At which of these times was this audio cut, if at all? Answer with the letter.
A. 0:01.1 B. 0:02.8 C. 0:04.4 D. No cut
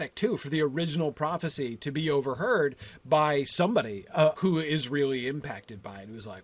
C